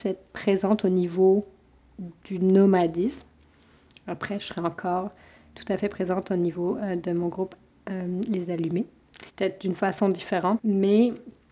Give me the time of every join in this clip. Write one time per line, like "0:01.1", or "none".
0:09.3
0:10.6